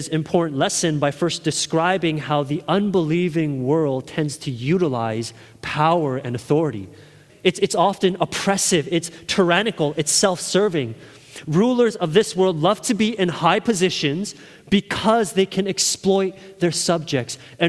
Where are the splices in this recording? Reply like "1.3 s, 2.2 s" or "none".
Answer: 7.3 s